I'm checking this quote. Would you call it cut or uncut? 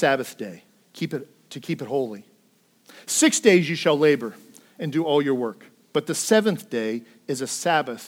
uncut